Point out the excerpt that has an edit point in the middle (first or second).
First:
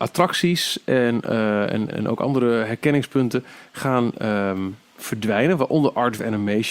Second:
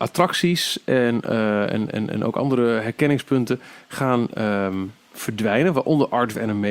first